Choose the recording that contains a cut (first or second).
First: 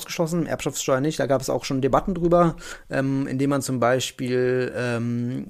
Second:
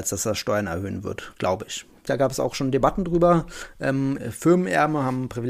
second